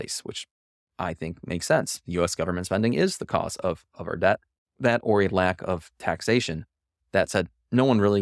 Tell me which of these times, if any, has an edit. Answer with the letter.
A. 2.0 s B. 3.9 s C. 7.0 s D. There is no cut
D